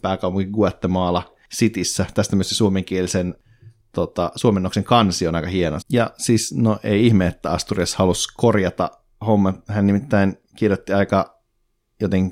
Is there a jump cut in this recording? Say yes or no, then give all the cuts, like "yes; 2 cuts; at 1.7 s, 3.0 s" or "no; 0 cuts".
yes; 1 cut; at 5.8 s